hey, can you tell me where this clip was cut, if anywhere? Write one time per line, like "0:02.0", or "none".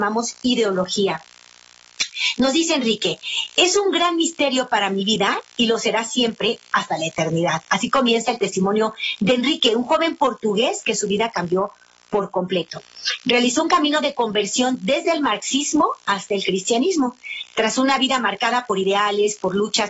none